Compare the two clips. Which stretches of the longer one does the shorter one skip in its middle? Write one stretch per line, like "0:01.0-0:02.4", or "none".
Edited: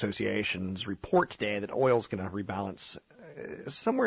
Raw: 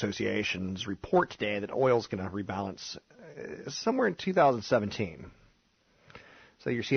none